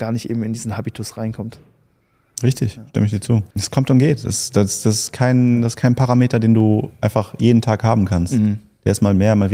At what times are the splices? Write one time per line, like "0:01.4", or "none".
0:03.5